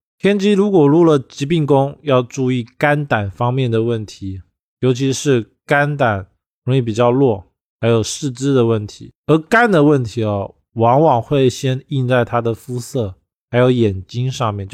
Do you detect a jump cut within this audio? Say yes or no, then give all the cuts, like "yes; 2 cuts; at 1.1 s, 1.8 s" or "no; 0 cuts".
no; 0 cuts